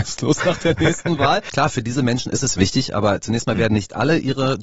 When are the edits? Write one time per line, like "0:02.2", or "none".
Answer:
0:01.5